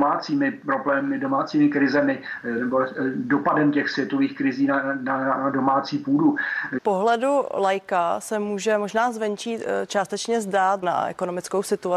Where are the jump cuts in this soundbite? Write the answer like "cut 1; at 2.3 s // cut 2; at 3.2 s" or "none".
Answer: cut 1; at 6.8 s // cut 2; at 10.8 s

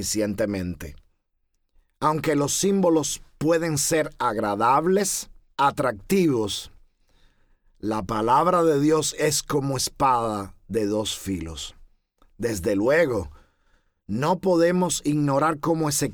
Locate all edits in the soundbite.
cut 1; at 5.5 s

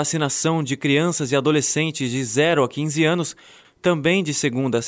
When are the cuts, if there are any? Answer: cut 1; at 3.6 s

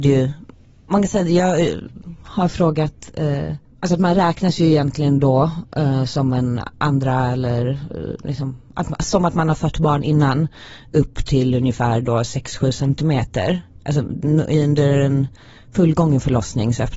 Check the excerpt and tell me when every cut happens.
none

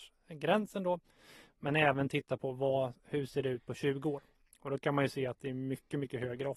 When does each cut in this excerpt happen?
none

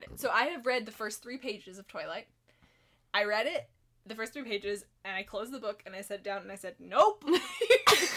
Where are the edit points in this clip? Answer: none

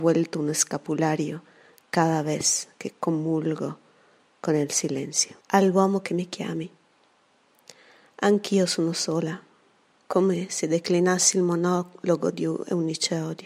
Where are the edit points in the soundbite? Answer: cut 1; at 5.4 s

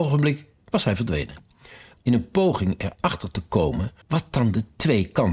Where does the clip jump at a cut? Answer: cut 1; at 1.9 s // cut 2; at 4.0 s

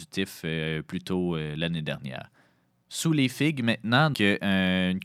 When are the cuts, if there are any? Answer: cut 1; at 4.1 s

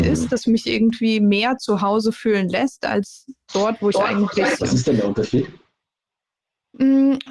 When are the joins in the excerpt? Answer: cut 1; at 4.6 s

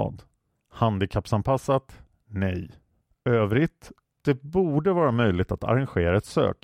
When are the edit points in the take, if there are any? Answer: cut 1; at 4.0 s

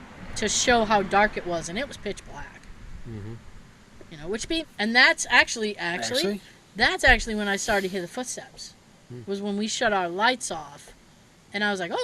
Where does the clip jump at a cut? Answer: cut 1; at 4.6 s

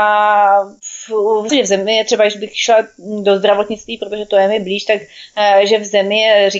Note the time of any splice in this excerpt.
cut 1; at 1.5 s

